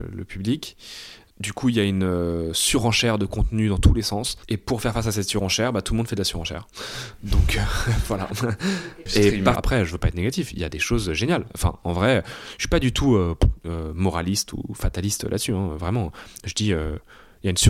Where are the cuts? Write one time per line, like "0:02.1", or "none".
0:09.5